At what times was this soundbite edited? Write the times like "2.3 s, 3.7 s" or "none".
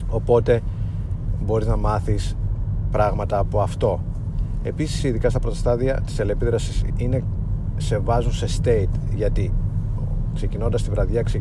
5.0 s, 6.9 s